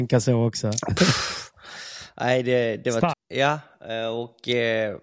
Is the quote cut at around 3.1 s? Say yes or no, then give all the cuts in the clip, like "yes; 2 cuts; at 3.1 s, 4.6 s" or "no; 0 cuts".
yes; 1 cut; at 3.1 s